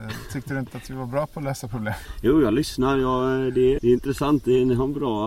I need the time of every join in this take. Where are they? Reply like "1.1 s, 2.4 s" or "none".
3.8 s

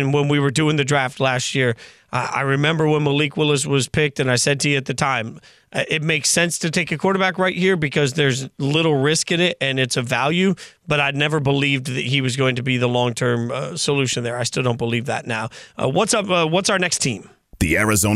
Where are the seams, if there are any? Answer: none

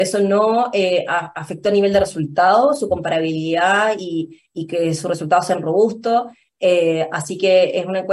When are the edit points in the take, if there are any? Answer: none

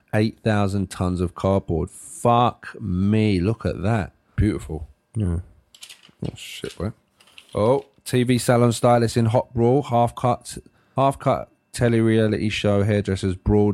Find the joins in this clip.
4.4 s

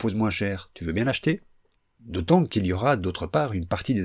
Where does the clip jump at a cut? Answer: none

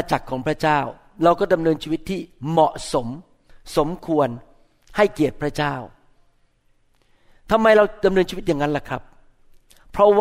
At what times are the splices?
none

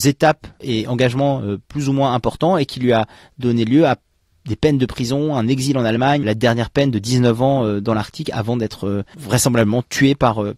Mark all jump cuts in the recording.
6.2 s

